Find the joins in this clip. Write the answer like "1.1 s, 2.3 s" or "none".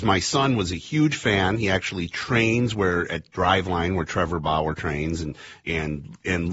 5.6 s